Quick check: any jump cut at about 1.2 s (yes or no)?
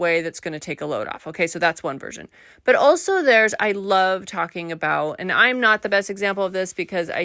no